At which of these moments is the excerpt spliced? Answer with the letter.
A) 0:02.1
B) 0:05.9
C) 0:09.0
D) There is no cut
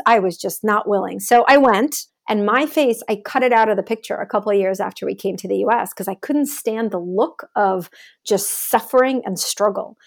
A